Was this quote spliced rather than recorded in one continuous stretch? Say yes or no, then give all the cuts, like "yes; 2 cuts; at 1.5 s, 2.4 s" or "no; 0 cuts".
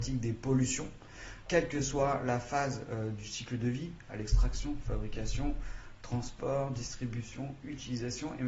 no; 0 cuts